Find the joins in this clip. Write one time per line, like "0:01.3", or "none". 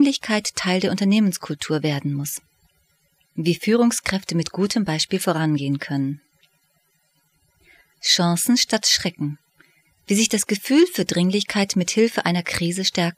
0:03.2